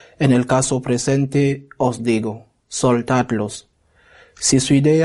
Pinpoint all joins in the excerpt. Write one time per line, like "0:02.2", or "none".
0:02.6